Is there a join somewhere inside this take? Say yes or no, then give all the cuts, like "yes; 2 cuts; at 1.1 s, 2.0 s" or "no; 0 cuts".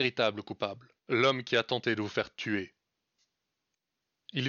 yes; 1 cut; at 1.0 s